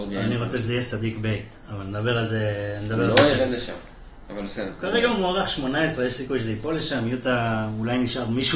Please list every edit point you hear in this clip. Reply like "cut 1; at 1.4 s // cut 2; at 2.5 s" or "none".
none